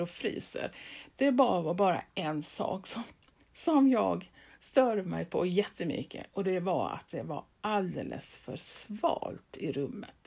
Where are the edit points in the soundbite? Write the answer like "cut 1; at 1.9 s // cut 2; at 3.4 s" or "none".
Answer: cut 1; at 1.1 s